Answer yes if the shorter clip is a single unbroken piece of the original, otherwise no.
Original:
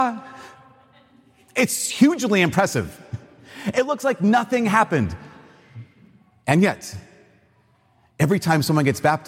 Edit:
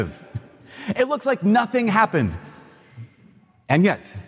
yes